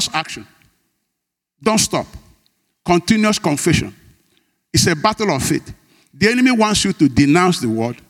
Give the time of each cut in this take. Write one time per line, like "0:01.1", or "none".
none